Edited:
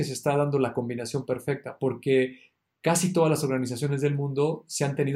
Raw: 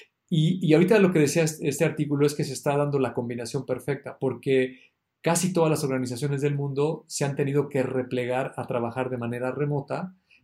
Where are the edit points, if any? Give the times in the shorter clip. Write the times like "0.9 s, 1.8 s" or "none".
none

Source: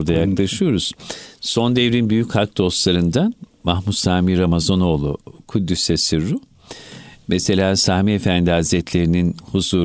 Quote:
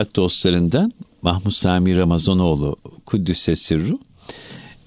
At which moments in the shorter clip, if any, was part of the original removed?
none

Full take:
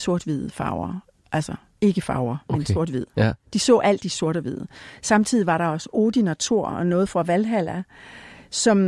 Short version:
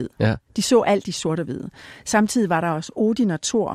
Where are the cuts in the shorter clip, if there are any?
none

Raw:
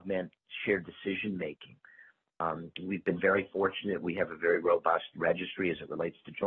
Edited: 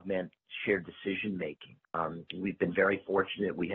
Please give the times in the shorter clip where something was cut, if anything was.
1.8 s

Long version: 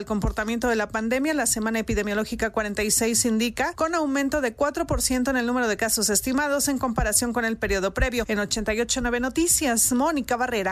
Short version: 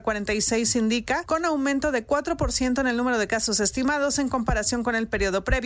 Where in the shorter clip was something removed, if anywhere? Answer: none

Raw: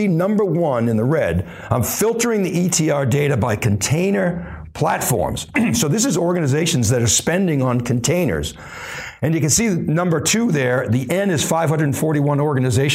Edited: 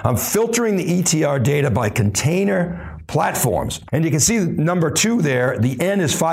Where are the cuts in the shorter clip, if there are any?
3.9 s

